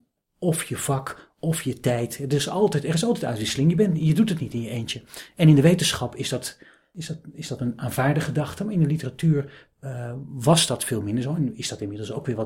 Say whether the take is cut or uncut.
uncut